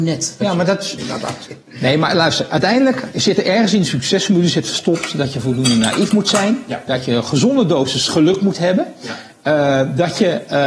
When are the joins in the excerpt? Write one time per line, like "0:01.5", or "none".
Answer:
0:01.0